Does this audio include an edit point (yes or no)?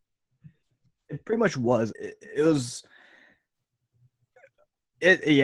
yes